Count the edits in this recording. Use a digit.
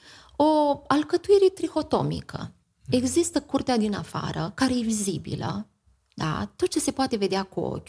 0